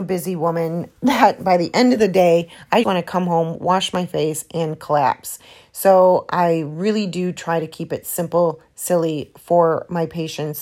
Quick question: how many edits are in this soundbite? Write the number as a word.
one